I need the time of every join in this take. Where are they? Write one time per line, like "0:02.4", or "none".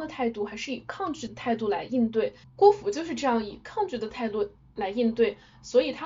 0:02.4